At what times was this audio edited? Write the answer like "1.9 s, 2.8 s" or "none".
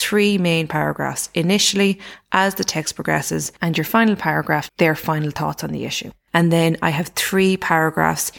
4.7 s, 6.3 s